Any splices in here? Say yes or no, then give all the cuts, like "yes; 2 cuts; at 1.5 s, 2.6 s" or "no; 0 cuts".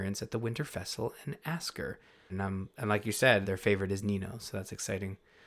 yes; 2 cuts; at 2.3 s, 3.4 s